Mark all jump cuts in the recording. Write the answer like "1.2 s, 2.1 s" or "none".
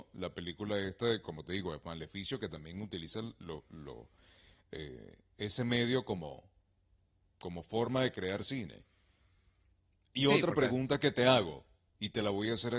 none